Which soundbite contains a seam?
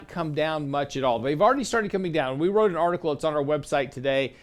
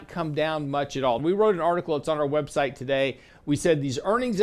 second; 2 cuts; at 1.2 s, 3.3 s

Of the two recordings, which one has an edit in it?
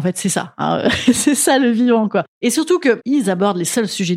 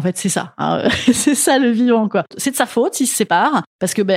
second; 1 cut; at 2.3 s

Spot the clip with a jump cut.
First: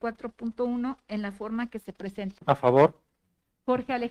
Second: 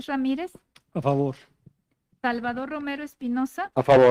first; 1 cut; at 2.4 s

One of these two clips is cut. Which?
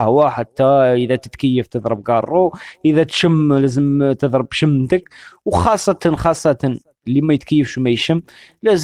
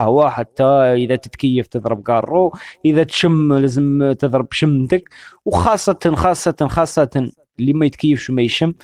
first; 1 cut; at 6.2 s

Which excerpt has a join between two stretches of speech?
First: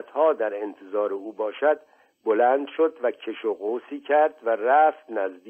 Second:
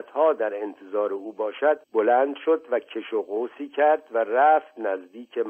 second; 1 cut; at 1.8 s

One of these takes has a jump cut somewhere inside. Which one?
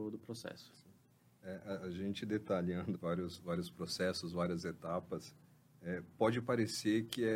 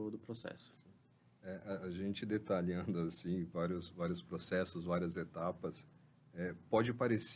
first; 1 cut; at 2.9 s

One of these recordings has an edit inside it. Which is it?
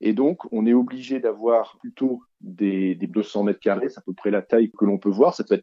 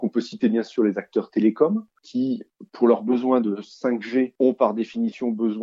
first; 2 cuts; at 3.1 s, 4.7 s

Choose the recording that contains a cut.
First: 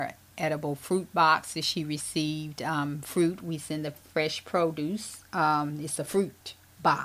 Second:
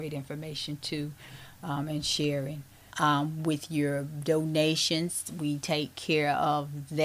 second; 1 cut; at 2.9 s

